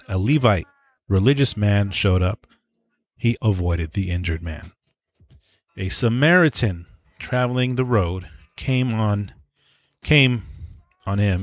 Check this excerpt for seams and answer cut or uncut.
cut